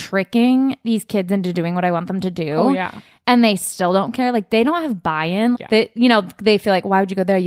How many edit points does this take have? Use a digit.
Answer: 1